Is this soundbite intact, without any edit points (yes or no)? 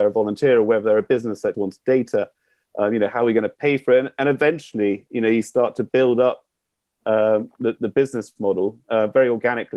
no